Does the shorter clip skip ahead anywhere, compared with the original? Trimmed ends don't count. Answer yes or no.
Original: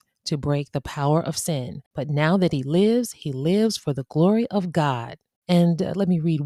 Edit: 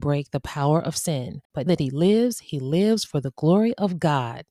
yes